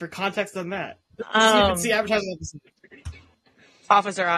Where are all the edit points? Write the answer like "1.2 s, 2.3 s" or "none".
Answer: 1.1 s

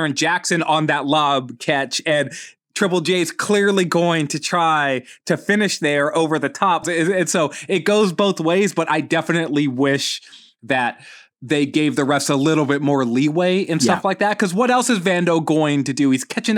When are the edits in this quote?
6.8 s

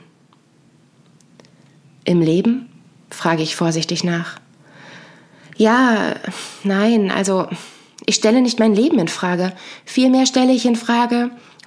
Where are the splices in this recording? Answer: none

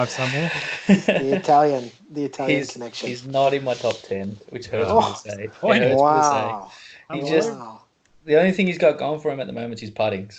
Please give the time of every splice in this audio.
none

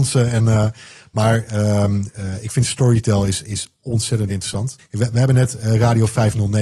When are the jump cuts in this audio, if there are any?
4.8 s

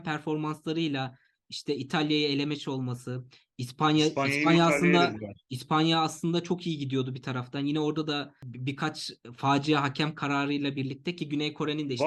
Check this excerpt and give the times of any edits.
5.4 s

